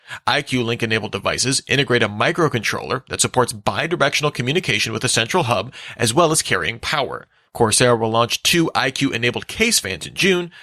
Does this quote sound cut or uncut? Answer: cut